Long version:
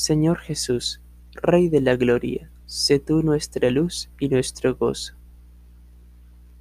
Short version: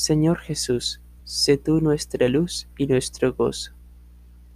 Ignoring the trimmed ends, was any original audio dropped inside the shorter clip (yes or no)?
yes